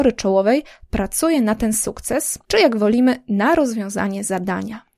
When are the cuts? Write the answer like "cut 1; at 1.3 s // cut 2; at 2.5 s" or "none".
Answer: none